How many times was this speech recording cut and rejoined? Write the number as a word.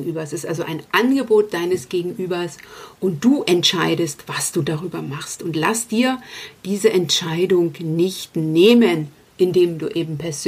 zero